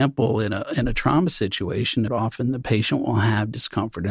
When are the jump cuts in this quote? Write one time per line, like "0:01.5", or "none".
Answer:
0:02.1